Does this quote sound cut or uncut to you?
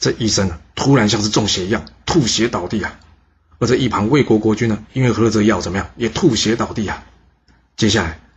uncut